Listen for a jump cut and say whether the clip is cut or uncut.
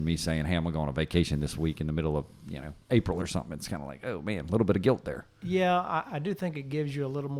uncut